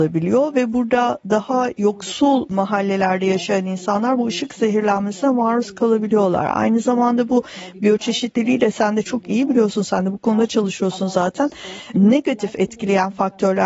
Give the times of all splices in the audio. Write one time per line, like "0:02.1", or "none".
none